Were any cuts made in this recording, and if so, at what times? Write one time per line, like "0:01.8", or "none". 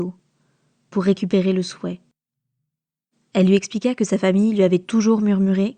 0:03.1